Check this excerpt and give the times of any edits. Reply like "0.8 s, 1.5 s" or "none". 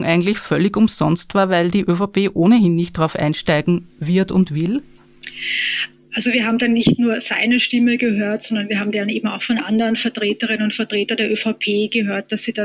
none